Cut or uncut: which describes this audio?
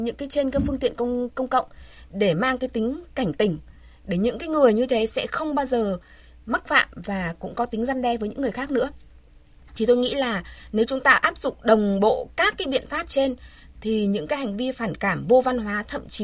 uncut